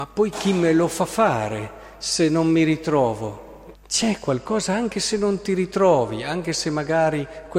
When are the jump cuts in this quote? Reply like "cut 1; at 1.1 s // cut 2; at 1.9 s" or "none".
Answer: cut 1; at 3.7 s